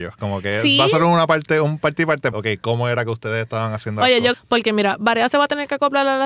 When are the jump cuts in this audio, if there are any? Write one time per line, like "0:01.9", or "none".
0:02.3
0:04.3